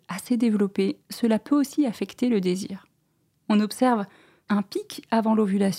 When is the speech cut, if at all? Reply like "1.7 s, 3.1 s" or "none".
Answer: 3.3 s